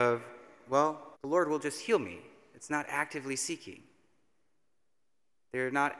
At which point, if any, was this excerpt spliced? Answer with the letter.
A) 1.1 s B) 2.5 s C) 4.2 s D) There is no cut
A